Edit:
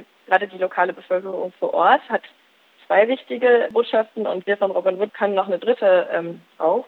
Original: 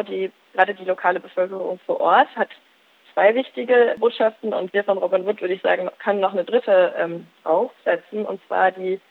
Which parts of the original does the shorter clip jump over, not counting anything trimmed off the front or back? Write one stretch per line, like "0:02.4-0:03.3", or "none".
0:05.4-0:05.9